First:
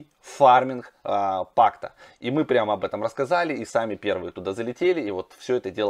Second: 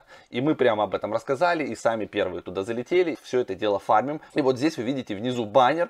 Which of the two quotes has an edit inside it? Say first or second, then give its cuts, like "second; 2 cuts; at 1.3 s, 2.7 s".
second; 2 cuts; at 3.1 s, 4.3 s